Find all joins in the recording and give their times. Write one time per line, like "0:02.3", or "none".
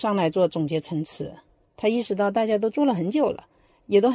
none